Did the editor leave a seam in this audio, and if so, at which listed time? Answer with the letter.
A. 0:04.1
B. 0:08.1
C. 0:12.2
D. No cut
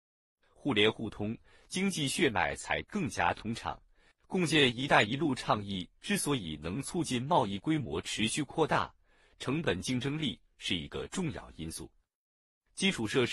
A